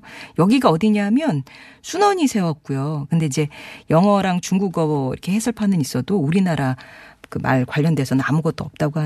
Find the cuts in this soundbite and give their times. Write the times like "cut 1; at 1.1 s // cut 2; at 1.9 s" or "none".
cut 1; at 3.1 s